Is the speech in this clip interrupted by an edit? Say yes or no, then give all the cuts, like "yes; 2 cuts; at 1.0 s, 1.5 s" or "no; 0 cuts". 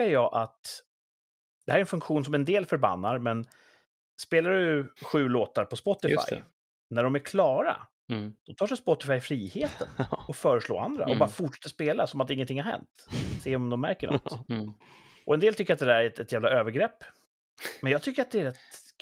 no; 0 cuts